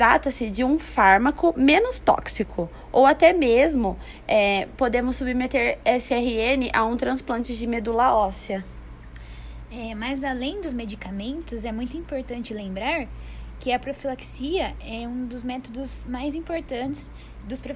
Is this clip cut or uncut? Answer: uncut